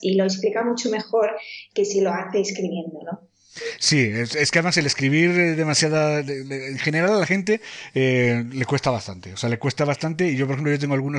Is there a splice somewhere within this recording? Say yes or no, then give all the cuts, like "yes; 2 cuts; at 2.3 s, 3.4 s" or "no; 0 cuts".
no; 0 cuts